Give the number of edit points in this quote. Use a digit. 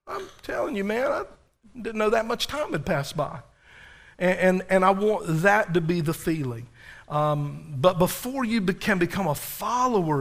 0